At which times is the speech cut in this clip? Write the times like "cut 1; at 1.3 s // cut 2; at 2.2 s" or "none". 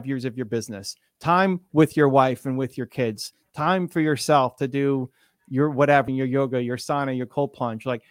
cut 1; at 6.1 s